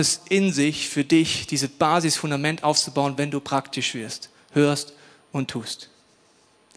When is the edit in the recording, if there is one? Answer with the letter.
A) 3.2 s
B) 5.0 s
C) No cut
C